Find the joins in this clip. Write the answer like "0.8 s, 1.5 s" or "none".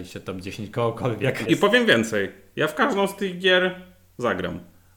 1.5 s